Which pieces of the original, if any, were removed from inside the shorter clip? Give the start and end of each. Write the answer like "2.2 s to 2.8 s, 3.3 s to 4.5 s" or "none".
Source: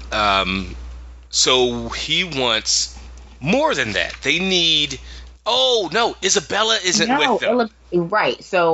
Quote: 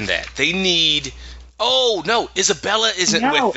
none